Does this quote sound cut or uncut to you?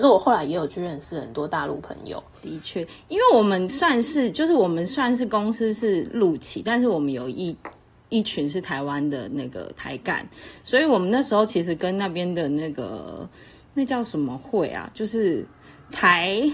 cut